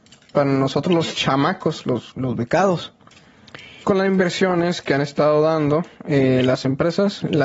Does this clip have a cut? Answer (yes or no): yes